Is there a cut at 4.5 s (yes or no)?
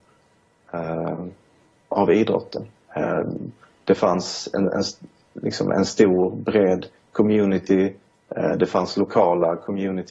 no